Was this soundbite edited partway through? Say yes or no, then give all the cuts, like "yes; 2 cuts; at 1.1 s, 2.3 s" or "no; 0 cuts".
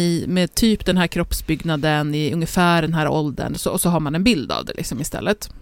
no; 0 cuts